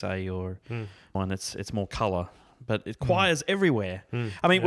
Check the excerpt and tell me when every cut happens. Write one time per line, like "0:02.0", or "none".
0:01.1